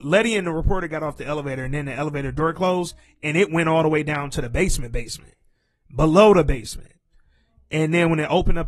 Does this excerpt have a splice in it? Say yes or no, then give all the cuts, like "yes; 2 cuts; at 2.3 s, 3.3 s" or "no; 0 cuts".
no; 0 cuts